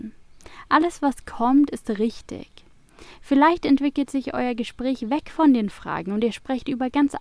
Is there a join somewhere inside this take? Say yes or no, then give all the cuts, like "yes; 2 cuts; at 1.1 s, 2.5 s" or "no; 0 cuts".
no; 0 cuts